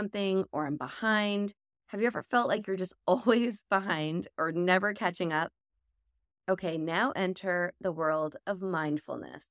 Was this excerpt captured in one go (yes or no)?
yes